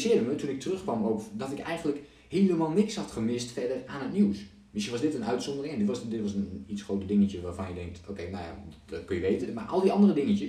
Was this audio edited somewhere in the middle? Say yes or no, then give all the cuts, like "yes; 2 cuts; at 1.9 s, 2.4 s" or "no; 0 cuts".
yes; 1 cut; at 9.5 s